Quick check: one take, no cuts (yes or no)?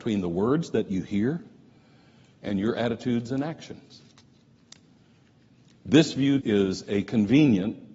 no